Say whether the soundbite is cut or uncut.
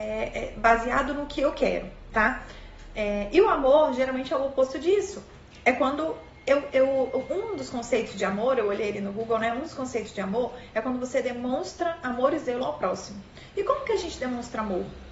uncut